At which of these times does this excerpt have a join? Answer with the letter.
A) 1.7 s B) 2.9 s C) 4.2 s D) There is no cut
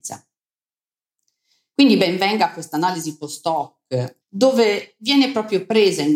C